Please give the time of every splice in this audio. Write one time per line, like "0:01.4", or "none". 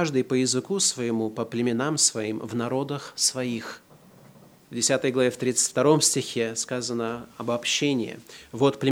none